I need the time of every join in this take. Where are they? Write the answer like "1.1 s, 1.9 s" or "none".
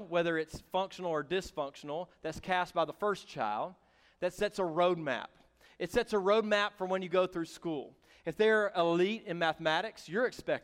none